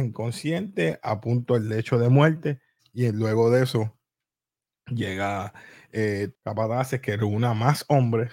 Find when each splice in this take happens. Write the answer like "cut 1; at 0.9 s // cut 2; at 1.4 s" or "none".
cut 1; at 2.8 s // cut 2; at 6.3 s